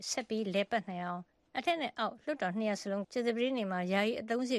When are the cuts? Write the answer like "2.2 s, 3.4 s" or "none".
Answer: 3.0 s